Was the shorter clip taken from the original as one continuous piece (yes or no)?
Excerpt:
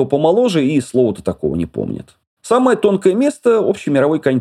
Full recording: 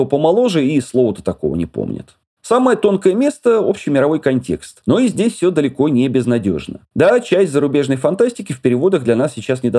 yes